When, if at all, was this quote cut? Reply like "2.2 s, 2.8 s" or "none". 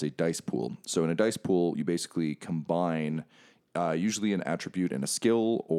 none